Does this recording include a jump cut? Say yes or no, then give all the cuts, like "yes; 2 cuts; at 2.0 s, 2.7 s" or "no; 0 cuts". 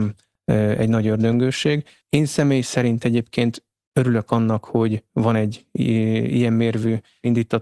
no; 0 cuts